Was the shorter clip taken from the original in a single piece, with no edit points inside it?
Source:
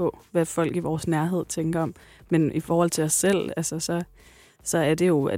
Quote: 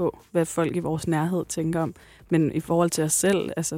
yes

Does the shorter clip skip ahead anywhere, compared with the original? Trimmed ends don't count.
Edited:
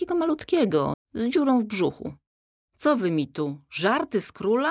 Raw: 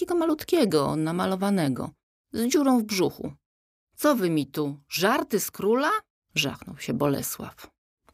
yes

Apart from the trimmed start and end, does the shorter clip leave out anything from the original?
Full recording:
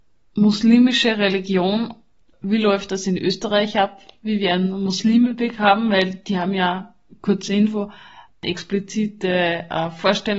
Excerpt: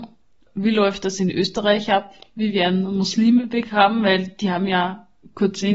no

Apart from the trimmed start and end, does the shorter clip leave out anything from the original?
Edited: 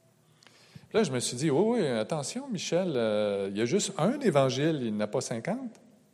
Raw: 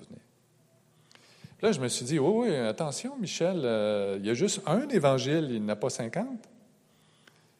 no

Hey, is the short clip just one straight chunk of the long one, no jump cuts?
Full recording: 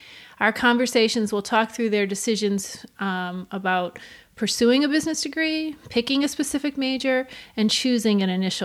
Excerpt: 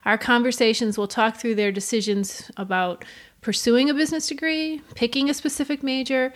no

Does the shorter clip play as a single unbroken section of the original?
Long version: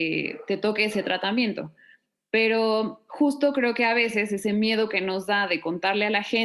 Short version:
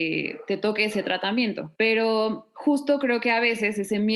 no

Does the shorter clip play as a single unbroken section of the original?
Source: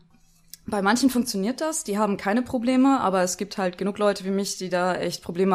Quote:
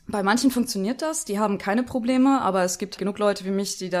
no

